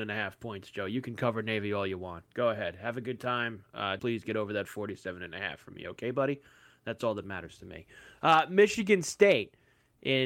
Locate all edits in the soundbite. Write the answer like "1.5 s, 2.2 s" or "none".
4.0 s